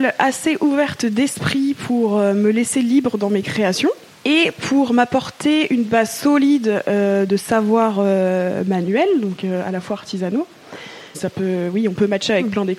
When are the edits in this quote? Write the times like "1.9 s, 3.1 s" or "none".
7.3 s, 11.1 s